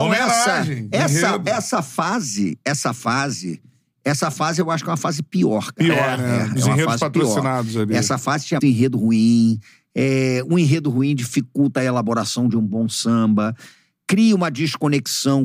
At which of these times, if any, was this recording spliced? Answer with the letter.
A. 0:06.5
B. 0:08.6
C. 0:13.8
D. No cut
B